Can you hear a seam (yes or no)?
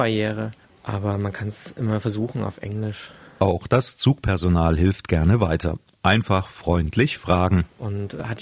no